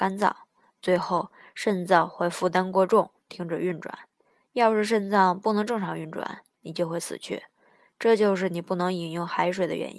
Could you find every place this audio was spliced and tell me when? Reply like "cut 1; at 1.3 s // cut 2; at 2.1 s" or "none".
none